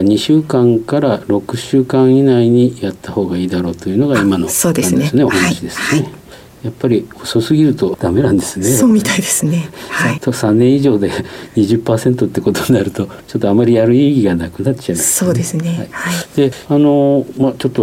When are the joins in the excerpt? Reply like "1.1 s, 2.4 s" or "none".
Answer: 10.2 s